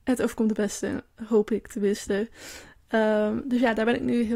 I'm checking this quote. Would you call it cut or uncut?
uncut